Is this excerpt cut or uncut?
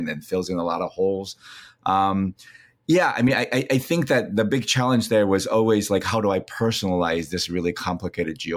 uncut